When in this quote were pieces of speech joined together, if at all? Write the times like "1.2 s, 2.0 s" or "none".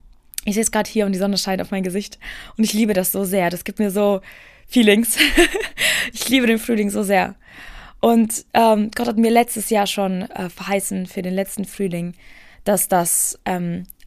none